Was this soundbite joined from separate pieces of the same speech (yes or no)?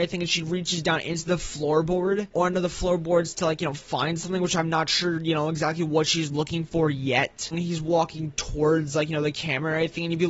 yes